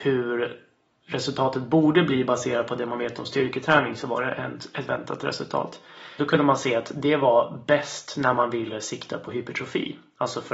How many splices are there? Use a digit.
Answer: 1